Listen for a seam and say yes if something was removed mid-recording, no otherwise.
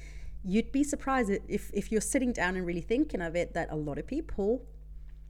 no